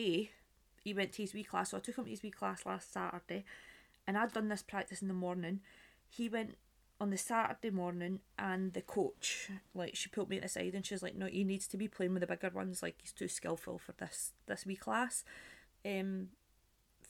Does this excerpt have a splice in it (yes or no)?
yes